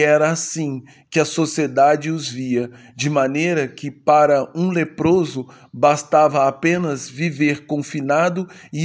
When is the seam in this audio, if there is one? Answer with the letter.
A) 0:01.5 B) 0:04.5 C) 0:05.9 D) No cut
D